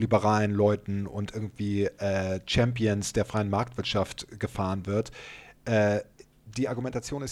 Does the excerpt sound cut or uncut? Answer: uncut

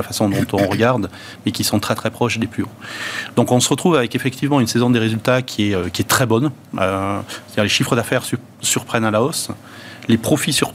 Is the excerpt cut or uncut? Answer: uncut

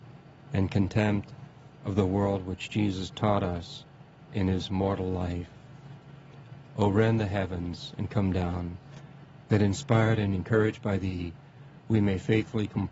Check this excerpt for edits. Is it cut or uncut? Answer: cut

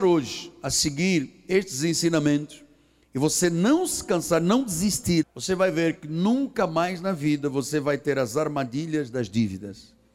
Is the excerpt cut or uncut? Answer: cut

